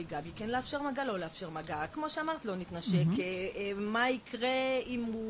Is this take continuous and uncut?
no; 1 cut; at 1.9 s

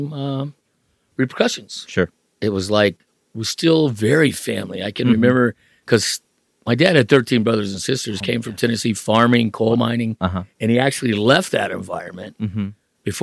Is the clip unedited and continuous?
yes; 0 cuts

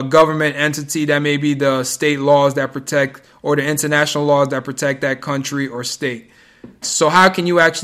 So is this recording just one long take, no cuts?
no; 1 cut; at 6.8 s

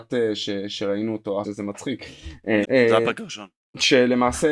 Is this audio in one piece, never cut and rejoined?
no; 2 cuts; at 1.4 s, 2.6 s

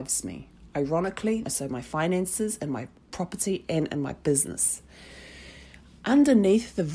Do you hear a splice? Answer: yes; 1 cut; at 1.4 s

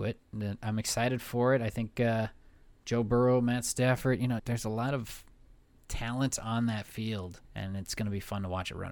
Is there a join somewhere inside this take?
yes; 2 cuts; at 4.4 s, 7.4 s

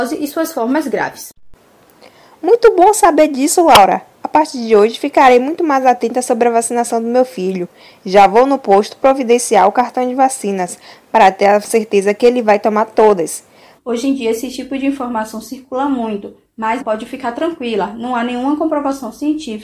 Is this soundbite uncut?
no; 2 cuts; at 13.8 s, 16.8 s

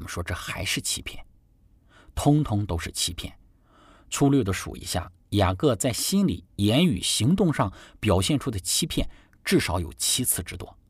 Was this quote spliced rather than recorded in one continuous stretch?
no; 0 cuts

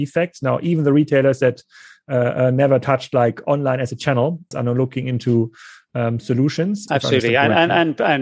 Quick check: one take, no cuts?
no; 2 cuts; at 4.5 s, 6.9 s

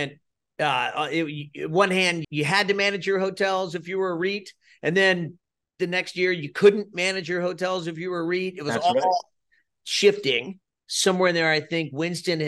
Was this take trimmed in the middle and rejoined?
yes; 1 cut; at 2.2 s

